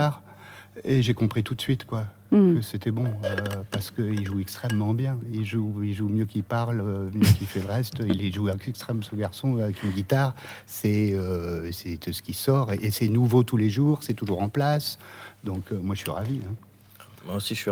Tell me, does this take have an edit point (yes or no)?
no